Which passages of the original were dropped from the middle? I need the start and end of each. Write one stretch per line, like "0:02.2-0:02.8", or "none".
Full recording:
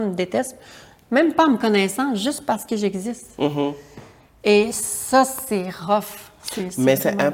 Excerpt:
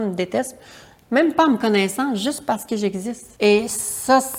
0:03.4-0:04.4

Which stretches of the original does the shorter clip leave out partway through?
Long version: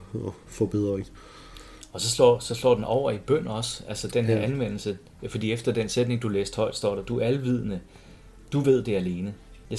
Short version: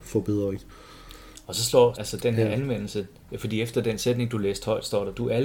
0:02.4-0:03.8

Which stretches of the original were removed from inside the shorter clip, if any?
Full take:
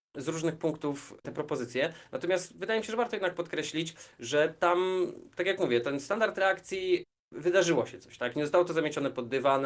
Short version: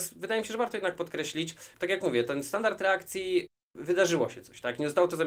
0:04.1-0:05.3

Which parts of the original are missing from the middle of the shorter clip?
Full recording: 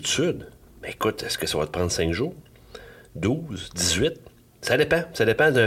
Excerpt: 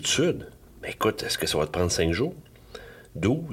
none

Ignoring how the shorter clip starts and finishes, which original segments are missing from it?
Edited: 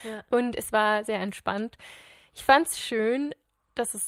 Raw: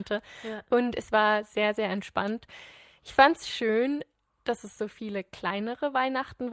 0:01.4-0:01.7

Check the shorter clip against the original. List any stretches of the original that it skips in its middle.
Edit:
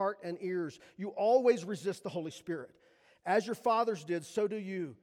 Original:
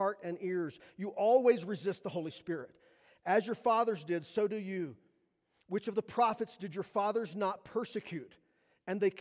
none

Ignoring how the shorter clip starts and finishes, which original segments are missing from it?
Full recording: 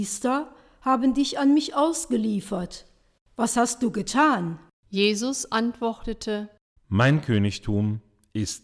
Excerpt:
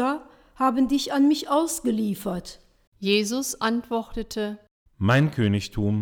0:03.1-0:04.8

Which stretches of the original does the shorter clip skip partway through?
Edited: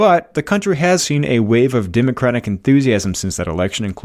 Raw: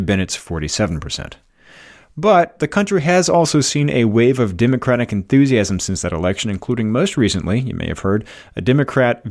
0:03.2-0:03.6

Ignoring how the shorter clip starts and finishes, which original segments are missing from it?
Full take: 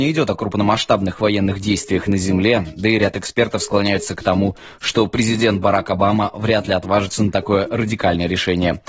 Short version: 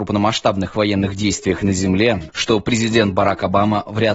0:02.7-0:04.8

